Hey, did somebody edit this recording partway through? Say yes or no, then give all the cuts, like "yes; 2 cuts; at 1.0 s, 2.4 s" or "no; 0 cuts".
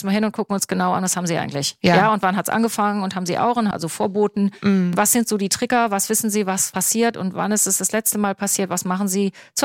yes; 1 cut; at 3.7 s